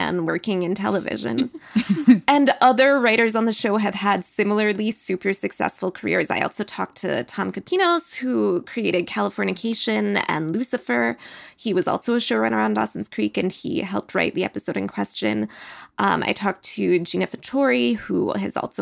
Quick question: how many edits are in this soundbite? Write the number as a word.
zero